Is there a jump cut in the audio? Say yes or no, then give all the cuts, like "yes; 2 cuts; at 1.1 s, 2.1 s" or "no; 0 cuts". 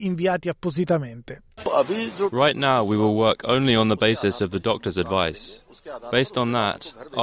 no; 0 cuts